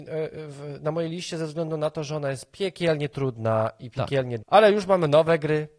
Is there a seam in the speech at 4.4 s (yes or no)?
yes